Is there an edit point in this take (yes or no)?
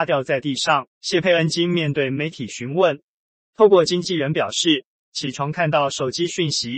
yes